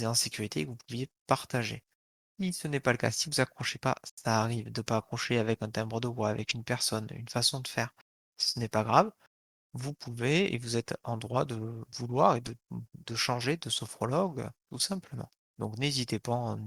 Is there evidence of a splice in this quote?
no; 0 cuts

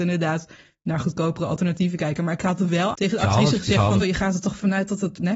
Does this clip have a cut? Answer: yes; 1 cut; at 4.0 s

